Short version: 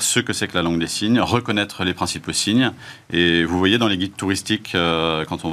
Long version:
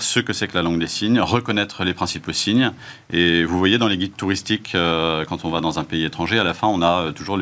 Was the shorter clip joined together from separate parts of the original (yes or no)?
no